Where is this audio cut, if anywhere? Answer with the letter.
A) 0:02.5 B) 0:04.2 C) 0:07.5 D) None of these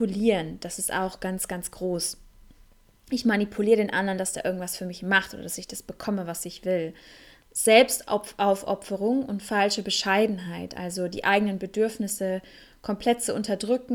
D